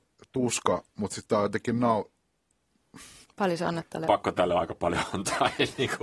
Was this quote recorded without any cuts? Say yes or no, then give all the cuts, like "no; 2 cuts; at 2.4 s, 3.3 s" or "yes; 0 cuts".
no; 1 cut; at 3.2 s